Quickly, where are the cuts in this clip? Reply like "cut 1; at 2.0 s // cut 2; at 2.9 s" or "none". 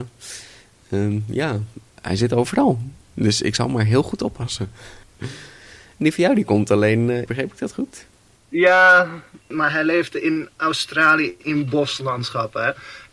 cut 1; at 7.3 s